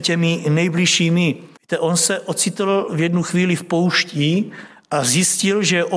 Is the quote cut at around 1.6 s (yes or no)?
yes